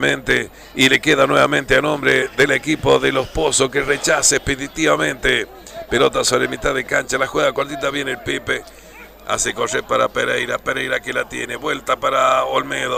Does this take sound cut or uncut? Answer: uncut